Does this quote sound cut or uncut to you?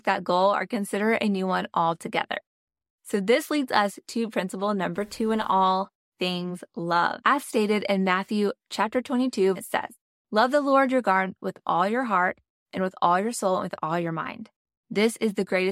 cut